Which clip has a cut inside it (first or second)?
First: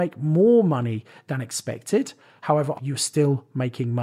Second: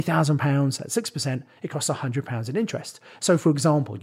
first